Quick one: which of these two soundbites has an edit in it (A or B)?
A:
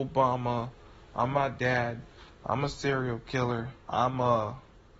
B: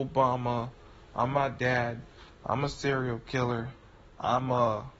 A